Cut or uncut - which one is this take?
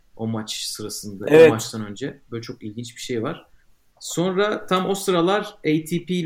uncut